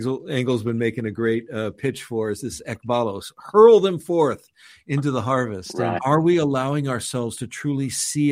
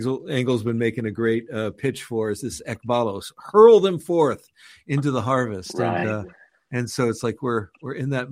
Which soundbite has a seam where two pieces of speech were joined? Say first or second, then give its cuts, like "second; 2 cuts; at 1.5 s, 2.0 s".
first; 1 cut; at 6.0 s